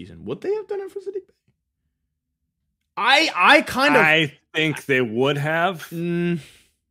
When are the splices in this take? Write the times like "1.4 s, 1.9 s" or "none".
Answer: none